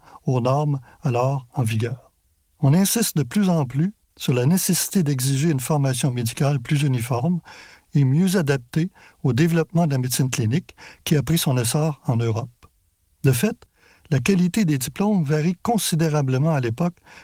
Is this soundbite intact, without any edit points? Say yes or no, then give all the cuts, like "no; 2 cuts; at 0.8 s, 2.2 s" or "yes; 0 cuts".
no; 1 cut; at 2.4 s